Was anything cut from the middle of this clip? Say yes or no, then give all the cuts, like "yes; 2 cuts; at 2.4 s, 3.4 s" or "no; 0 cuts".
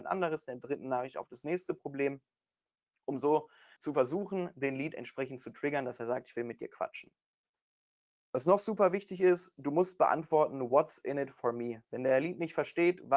yes; 1 cut; at 3.8 s